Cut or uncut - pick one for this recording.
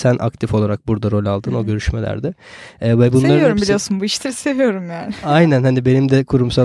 uncut